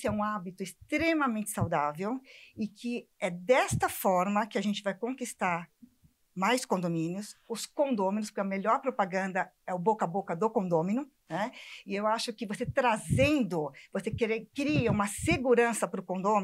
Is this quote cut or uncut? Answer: uncut